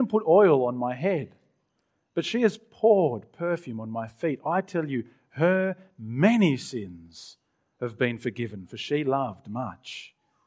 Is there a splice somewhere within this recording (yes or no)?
no